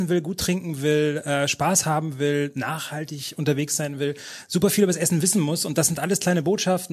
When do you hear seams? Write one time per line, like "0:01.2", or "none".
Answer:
none